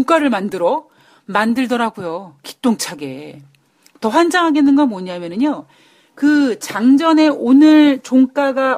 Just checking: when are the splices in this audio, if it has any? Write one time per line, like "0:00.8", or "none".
none